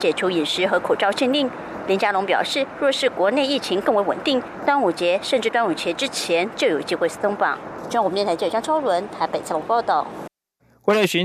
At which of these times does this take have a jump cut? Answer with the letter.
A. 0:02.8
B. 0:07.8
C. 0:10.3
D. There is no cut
D